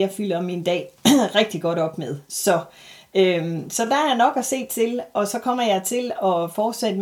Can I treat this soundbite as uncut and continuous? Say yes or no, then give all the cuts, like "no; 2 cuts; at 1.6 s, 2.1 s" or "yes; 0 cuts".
yes; 0 cuts